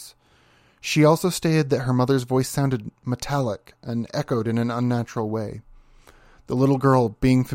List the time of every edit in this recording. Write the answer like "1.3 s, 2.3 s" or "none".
none

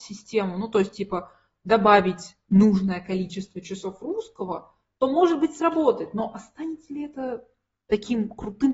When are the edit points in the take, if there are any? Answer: none

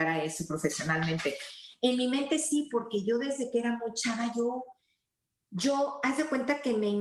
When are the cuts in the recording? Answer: none

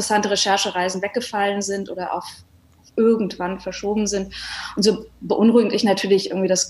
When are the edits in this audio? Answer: none

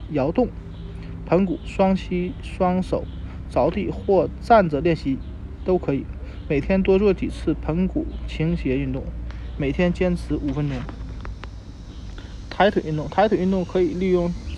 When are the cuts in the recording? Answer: 1.6 s

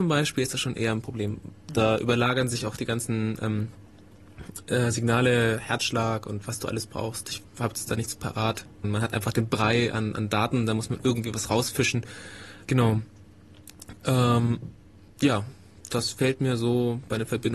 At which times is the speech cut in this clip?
8.8 s, 12.6 s

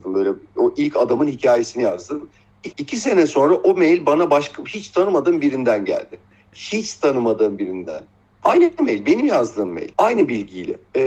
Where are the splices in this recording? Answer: 2.7 s

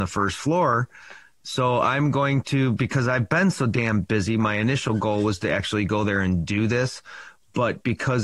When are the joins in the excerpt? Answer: none

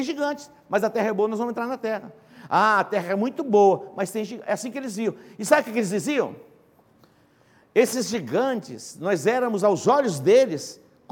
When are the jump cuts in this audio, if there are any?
none

